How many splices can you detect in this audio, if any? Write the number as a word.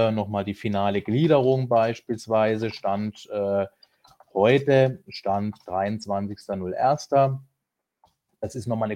one